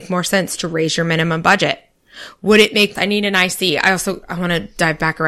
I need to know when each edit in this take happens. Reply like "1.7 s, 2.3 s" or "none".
3.0 s